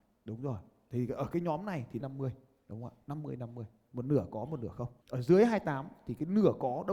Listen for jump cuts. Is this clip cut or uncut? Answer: cut